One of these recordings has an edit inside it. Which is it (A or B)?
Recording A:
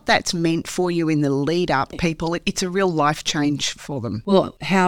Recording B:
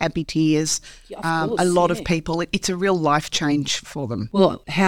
A